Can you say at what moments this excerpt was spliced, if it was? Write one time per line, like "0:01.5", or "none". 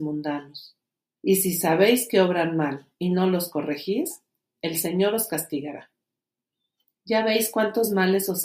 0:01.2